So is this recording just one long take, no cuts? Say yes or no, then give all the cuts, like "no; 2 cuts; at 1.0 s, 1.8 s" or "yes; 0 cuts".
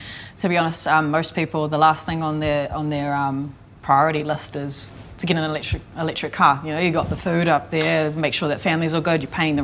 yes; 0 cuts